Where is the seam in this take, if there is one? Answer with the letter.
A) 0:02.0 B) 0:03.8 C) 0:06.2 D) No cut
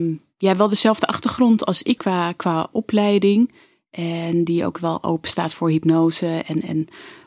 A